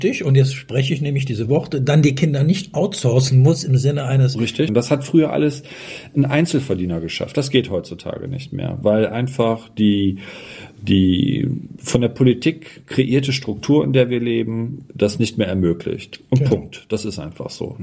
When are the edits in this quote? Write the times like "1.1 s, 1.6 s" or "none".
4.7 s